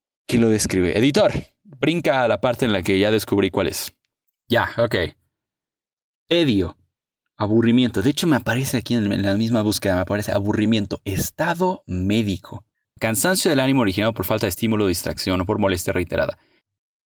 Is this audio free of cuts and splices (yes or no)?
no